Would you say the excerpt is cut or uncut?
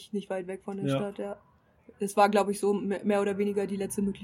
uncut